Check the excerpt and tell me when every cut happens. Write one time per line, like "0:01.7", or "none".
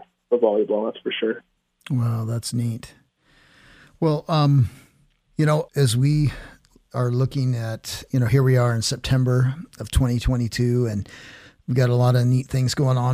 none